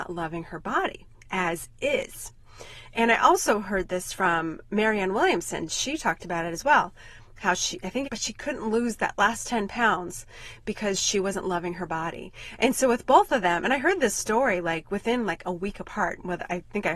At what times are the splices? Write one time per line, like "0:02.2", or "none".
0:08.0